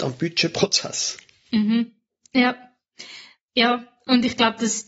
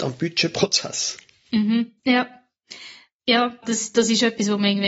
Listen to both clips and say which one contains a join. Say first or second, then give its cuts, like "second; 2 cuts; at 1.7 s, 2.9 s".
second; 2 cuts; at 2.0 s, 3.6 s